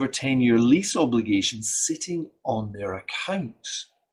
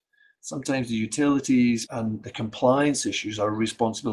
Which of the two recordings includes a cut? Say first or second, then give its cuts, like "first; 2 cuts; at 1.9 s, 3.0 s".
second; 1 cut; at 1.9 s